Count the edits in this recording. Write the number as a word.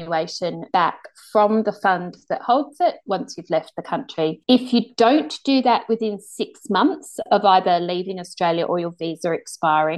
zero